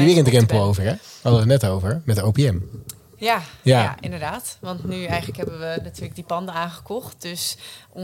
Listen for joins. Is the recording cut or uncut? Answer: uncut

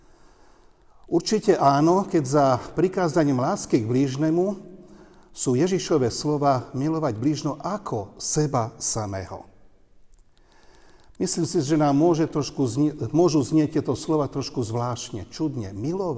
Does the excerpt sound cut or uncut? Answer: uncut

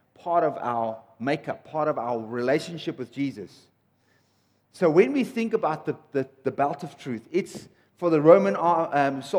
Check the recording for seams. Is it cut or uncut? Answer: uncut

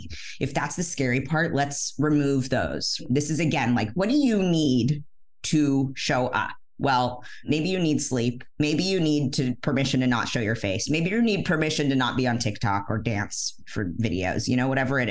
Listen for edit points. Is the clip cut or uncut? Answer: uncut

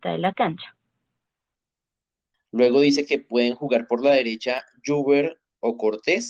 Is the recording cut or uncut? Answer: cut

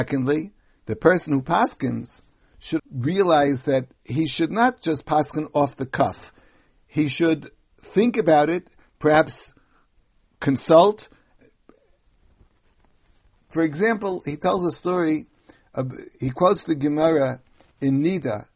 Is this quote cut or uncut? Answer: cut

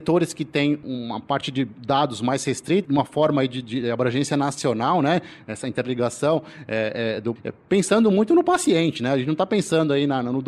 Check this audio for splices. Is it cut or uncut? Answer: cut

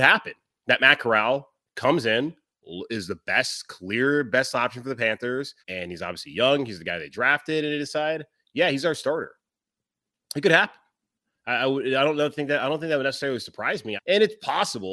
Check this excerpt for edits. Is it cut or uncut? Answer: cut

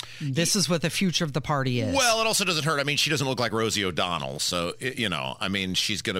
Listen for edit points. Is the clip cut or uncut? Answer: uncut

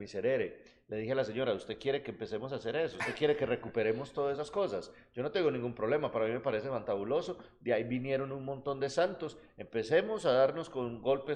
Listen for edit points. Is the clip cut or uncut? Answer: uncut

